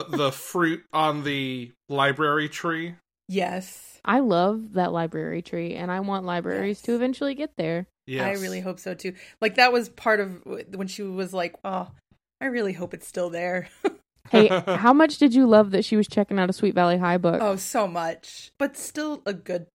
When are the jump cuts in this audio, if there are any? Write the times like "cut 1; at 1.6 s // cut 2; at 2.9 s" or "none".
cut 1; at 11.6 s // cut 2; at 18.5 s